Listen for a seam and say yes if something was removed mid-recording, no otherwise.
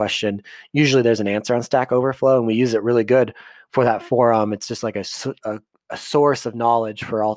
no